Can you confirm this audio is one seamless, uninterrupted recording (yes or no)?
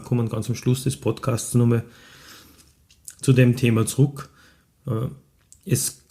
yes